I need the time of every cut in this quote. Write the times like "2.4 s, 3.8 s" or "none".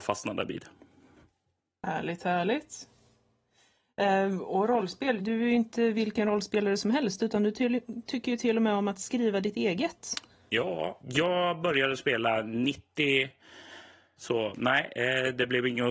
5.2 s, 11.0 s, 14.2 s